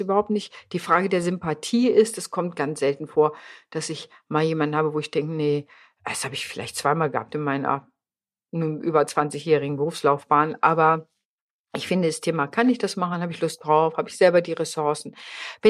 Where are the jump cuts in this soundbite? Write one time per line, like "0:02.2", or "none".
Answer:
none